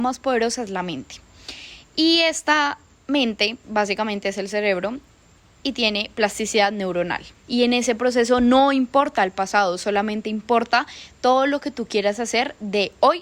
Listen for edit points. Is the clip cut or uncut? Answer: cut